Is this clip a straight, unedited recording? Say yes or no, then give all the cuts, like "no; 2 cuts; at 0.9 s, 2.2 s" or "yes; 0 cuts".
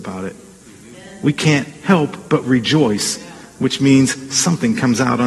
yes; 0 cuts